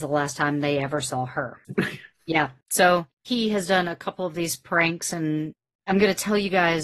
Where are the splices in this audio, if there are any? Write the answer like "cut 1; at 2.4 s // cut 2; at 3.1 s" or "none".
cut 1; at 1.8 s